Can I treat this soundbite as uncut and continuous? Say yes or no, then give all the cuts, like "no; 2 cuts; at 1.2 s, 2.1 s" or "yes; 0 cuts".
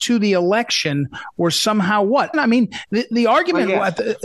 no; 1 cut; at 2.3 s